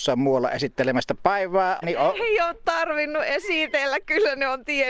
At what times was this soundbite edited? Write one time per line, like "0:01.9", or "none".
0:01.8